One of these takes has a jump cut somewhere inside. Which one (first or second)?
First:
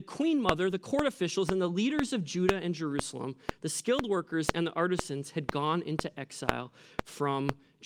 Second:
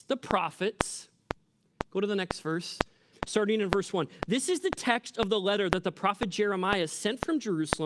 second